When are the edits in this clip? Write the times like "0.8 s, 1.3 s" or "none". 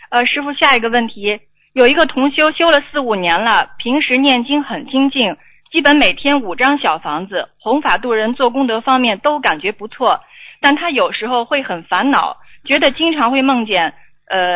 none